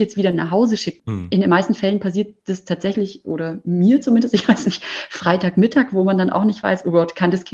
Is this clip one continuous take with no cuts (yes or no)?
yes